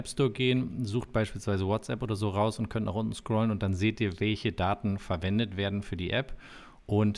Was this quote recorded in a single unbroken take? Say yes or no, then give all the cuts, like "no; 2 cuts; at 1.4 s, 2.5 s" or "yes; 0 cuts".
yes; 0 cuts